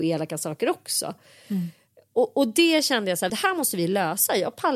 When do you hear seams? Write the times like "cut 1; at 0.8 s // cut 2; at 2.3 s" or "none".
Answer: cut 1; at 3.3 s